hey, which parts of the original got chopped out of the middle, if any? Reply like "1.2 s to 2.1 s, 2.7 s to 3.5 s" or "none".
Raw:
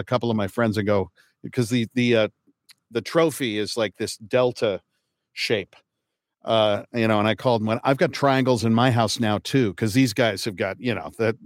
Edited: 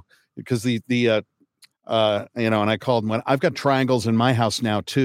2.8 s to 6.3 s